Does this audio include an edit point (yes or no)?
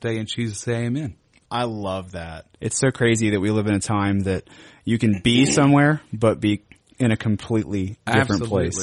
yes